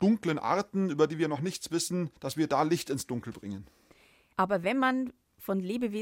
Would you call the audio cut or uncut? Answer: cut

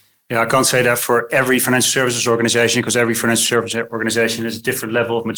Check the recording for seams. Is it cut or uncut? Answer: uncut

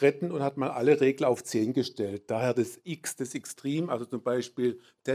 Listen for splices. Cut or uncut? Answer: uncut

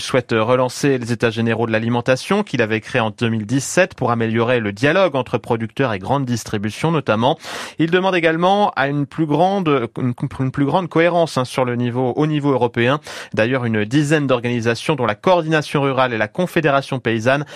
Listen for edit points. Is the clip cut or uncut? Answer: uncut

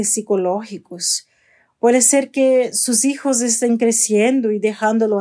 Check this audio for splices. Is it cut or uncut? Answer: uncut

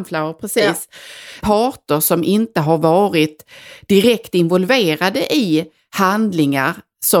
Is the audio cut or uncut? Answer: cut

